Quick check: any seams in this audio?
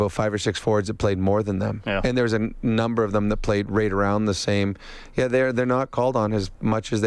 no; 0 cuts

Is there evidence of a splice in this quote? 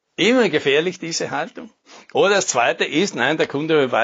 no; 0 cuts

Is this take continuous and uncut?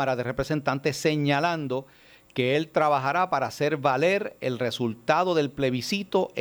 yes; 0 cuts

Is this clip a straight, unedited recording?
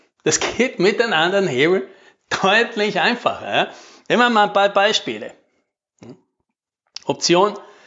yes; 0 cuts

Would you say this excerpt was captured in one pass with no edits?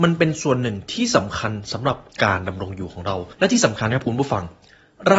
yes; 0 cuts

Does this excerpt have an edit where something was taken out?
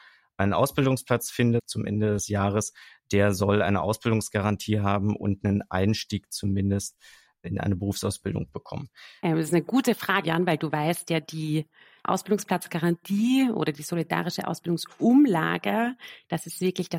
yes; 2 cuts; at 9.2 s, 10.2 s

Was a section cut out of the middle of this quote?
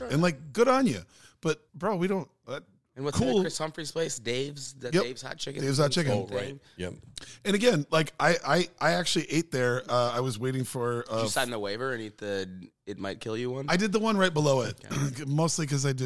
yes; 1 cut; at 1.7 s

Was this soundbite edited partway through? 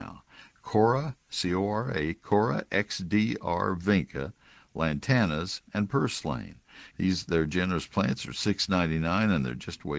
yes; 1 cut; at 6.9 s

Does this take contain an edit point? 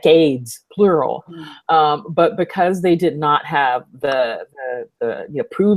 no; 0 cuts

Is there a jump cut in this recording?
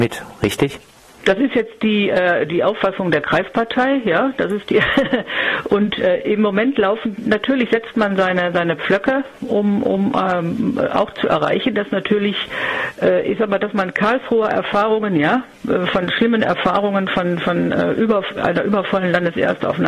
no; 0 cuts

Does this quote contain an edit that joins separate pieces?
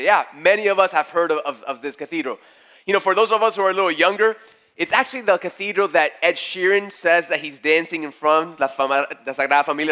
no; 0 cuts

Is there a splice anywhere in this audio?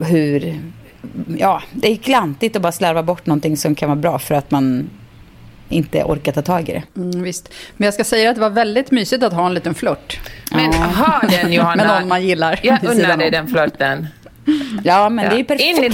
no; 0 cuts

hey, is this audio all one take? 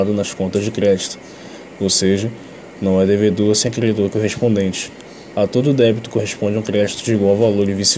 yes; 0 cuts

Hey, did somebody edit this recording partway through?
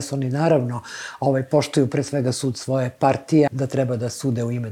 yes; 1 cut; at 3.5 s

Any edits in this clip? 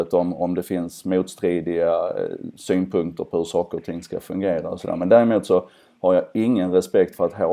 no; 0 cuts

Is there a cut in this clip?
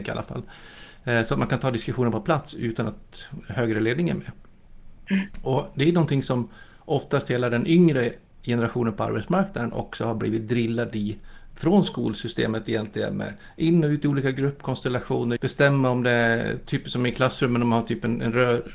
yes; 1 cut; at 15.4 s

